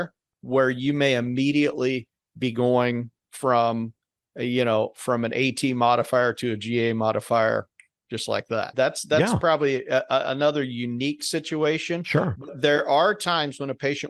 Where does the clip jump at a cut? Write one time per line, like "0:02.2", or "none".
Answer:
0:08.7

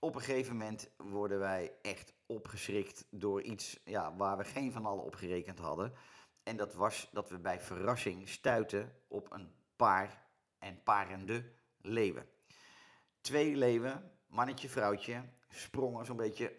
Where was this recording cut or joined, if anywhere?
none

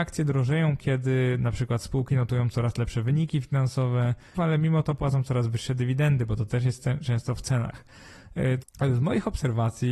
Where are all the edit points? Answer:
0:04.3
0:08.6

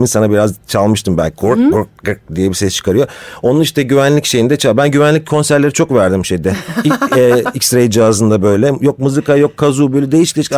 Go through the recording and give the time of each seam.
none

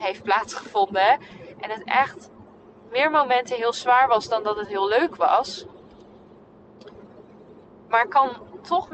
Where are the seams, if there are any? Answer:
none

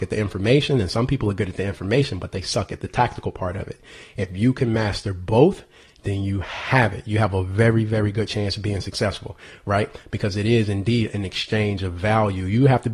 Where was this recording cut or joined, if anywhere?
none

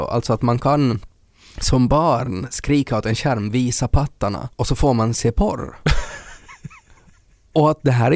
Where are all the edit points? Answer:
0:04.5

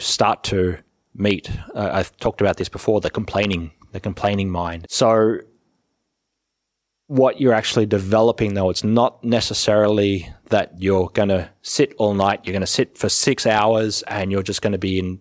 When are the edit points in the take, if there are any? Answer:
0:04.8

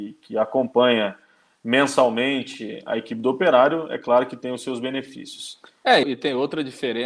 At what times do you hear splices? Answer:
0:06.0

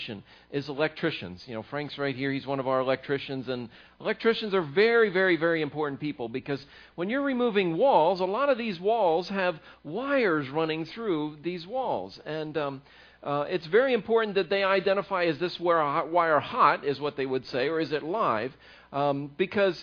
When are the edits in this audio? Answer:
none

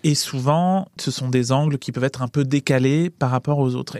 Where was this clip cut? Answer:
0:01.0

